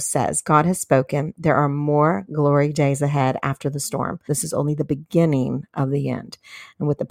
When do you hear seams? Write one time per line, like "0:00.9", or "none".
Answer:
0:04.3